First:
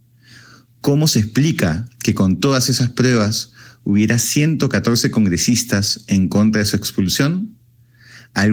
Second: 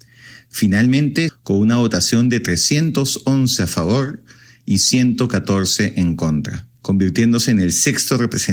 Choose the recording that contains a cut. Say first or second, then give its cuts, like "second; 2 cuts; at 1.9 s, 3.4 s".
second; 2 cuts; at 1.3 s, 6.8 s